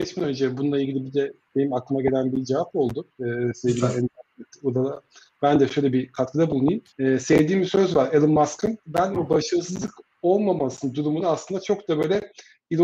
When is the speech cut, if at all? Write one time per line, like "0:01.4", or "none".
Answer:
0:06.9
0:08.9